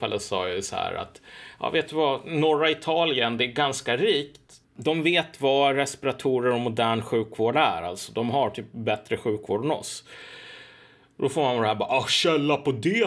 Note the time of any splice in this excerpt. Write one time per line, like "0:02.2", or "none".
0:04.6